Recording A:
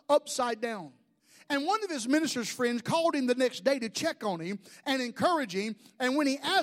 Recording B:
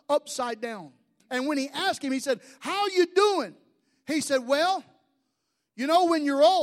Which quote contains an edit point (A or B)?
B